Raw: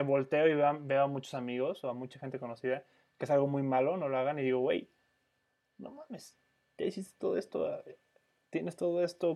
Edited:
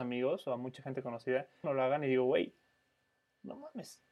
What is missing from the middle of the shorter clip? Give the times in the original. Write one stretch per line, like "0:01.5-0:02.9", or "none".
0:03.0-0:04.0